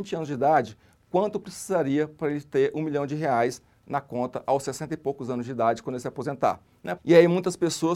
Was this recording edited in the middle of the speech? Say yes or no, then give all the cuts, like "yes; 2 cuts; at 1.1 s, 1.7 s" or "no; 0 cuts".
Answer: yes; 1 cut; at 7.0 s